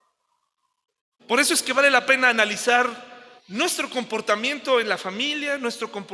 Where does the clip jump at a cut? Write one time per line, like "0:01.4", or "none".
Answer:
0:01.2
0:03.4